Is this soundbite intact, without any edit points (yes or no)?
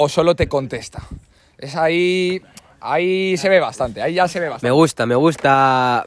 yes